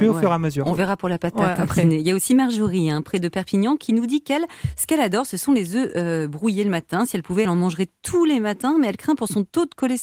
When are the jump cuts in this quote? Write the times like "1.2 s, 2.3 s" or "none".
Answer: none

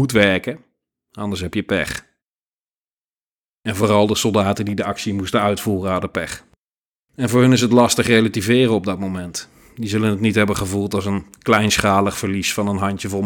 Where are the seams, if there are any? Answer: 6.9 s

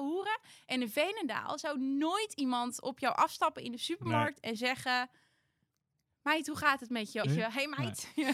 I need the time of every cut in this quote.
7.2 s

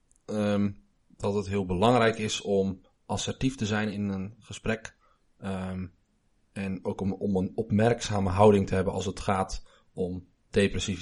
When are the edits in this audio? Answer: none

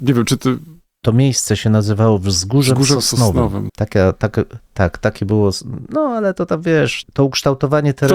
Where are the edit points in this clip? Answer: 3.7 s, 7.0 s

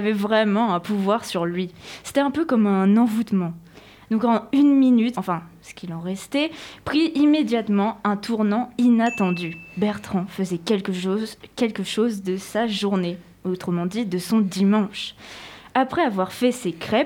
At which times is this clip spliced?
5.1 s

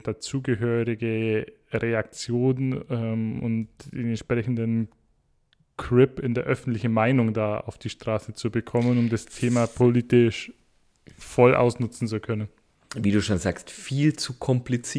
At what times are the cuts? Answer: none

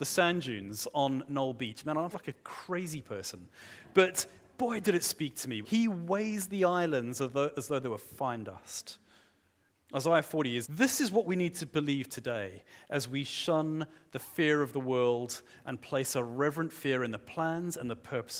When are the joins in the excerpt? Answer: 2.1 s, 5.6 s, 10.6 s

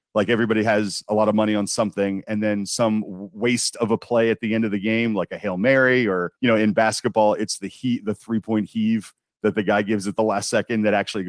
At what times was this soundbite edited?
6.4 s

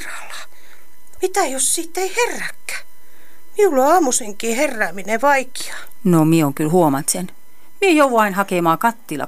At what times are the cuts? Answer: 1.2 s

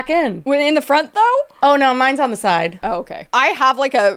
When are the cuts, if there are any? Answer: none

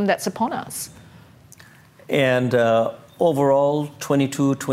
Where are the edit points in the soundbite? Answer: none

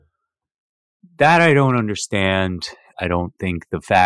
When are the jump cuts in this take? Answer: 2.9 s

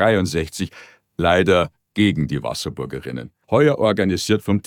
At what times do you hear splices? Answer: 3.4 s

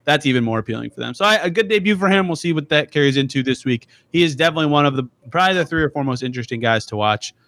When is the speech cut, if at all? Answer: none

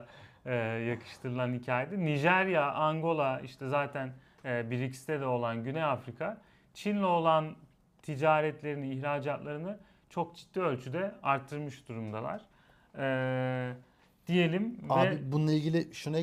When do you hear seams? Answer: none

